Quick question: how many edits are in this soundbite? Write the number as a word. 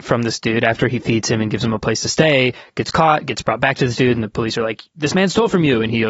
zero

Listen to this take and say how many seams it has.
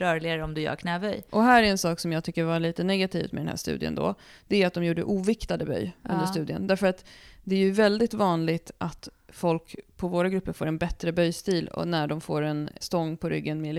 one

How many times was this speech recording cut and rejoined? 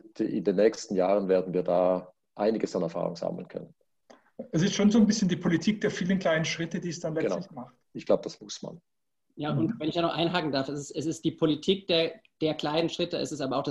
one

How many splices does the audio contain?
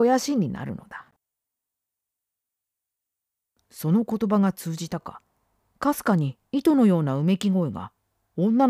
zero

